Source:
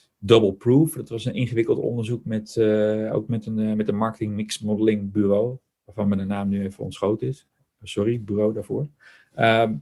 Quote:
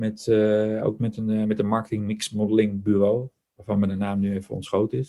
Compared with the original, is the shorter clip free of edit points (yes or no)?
yes